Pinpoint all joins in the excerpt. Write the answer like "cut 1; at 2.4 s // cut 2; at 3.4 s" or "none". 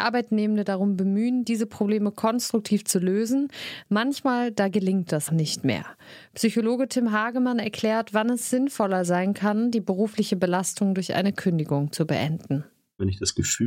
cut 1; at 5.3 s